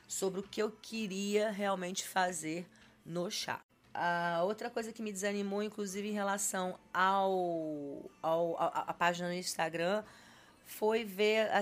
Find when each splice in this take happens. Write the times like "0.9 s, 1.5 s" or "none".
none